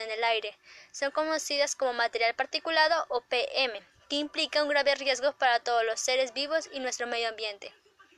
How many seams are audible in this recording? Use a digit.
0